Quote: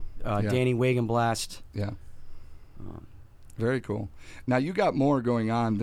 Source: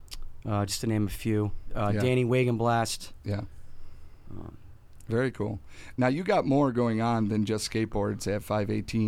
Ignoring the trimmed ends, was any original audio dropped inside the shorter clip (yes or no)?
no